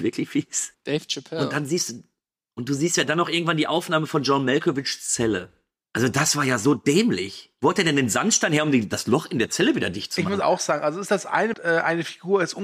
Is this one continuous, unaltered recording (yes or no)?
no